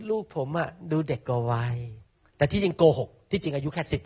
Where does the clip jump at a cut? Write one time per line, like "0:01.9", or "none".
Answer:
none